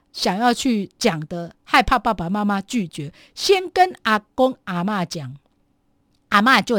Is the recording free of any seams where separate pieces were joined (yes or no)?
yes